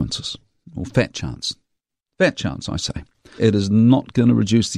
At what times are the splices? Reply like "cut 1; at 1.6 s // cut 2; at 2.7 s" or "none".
cut 1; at 3.4 s